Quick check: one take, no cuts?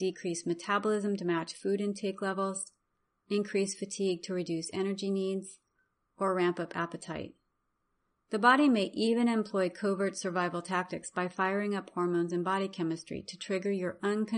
yes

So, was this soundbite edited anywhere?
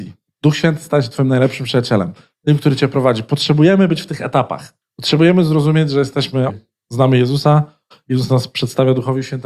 yes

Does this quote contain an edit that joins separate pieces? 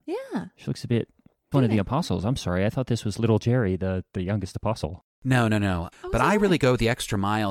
yes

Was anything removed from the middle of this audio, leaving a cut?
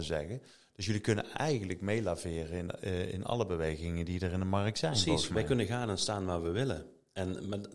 no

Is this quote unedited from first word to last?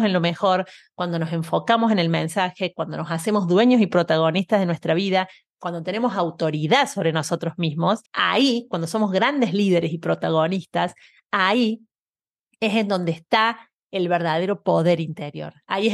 no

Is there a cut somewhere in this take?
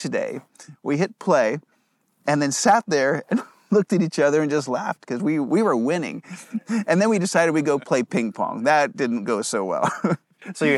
no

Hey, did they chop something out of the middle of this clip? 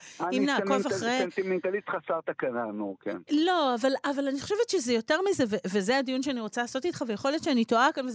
no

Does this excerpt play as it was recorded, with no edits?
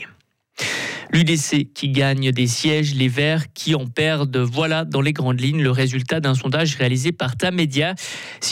yes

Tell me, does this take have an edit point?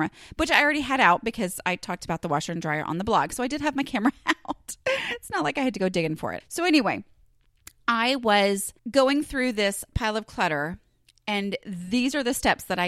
yes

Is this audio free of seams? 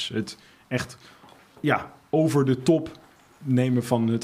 yes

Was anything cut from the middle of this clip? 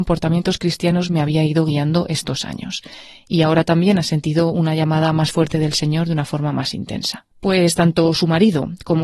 yes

